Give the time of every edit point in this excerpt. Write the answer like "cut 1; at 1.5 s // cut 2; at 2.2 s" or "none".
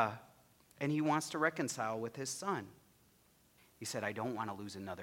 cut 1; at 3.6 s